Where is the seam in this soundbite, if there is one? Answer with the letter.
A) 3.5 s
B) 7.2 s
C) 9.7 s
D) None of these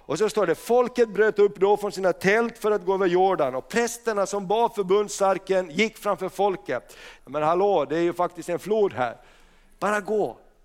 B